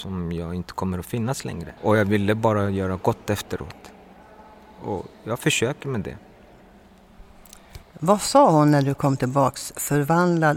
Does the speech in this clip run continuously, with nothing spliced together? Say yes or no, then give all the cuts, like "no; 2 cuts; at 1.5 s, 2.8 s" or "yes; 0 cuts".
no; 2 cuts; at 1.8 s, 7.8 s